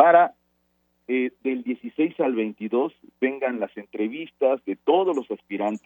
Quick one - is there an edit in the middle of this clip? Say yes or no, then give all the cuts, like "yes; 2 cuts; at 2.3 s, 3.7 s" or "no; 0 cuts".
no; 0 cuts